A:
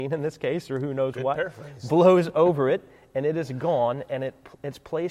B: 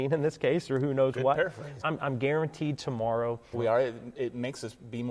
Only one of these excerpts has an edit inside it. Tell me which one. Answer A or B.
B